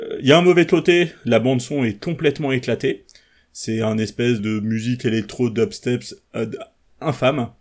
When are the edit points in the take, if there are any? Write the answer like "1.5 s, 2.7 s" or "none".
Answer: 4.4 s